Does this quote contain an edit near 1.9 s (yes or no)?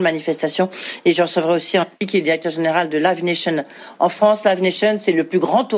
yes